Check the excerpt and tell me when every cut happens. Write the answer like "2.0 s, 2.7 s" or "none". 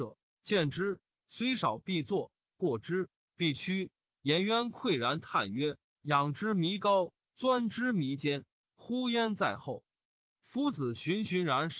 8.6 s